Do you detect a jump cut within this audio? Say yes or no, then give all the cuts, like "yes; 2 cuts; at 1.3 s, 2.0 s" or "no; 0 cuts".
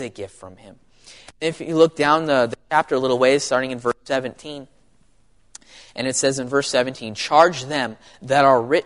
no; 0 cuts